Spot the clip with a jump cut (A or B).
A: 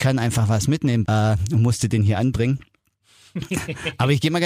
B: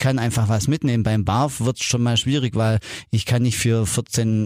A